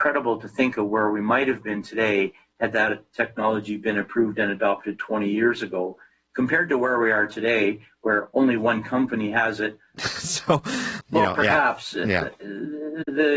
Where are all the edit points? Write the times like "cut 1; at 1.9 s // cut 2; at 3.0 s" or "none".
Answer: cut 1; at 9.9 s // cut 2; at 11.0 s